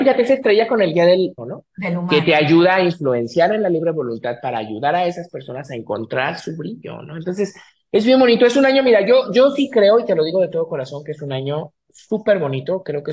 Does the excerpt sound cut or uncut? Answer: cut